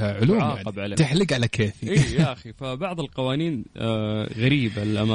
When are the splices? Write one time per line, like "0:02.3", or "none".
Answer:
0:00.9